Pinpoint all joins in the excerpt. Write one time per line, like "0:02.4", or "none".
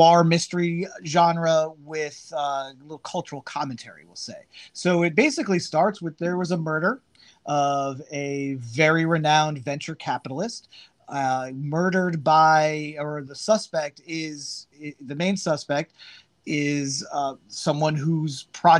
none